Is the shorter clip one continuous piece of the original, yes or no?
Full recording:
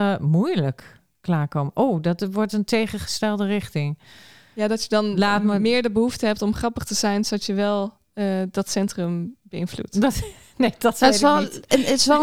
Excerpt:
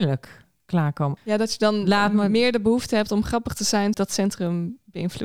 no